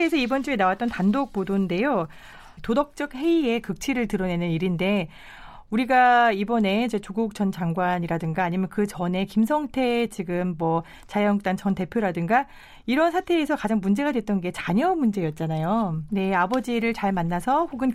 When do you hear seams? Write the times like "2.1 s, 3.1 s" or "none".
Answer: 2.6 s, 16.1 s

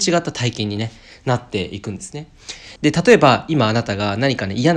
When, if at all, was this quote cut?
2.8 s

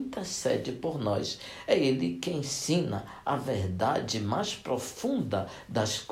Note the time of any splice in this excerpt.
none

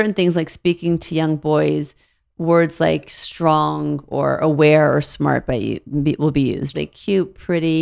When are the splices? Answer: 6.7 s

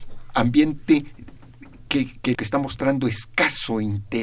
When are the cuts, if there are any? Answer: 2.3 s

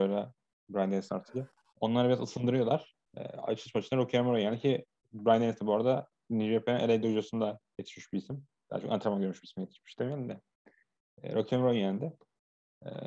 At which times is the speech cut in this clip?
1.7 s

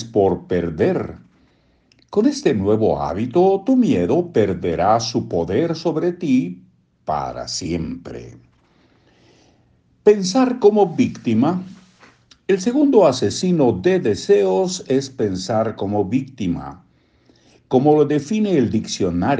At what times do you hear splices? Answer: none

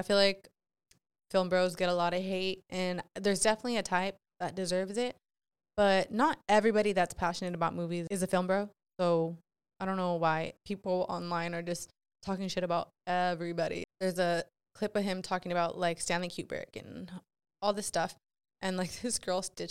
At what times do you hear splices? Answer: 10.6 s, 13.8 s

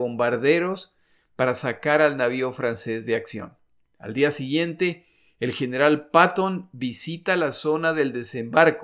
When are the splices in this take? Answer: 3.8 s

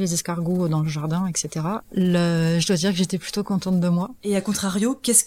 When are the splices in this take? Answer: 1.8 s

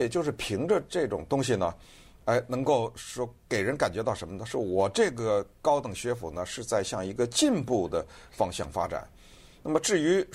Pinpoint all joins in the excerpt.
none

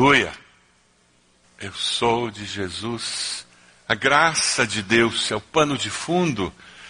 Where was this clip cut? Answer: 1.4 s, 3.7 s

